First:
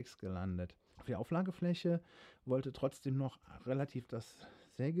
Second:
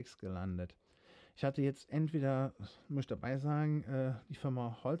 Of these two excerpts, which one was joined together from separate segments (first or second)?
first